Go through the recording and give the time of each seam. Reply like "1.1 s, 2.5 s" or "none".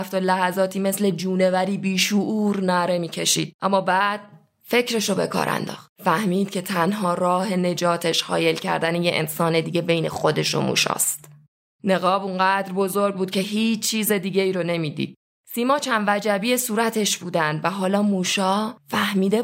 5.9 s